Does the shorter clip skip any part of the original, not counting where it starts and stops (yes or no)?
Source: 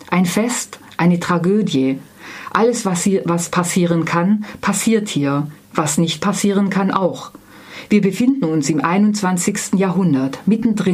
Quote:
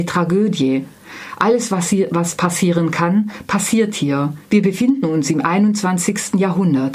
yes